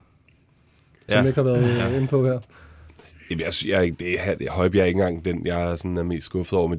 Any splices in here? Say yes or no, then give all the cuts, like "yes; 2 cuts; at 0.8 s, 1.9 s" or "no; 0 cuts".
yes; 1 cut; at 1.1 s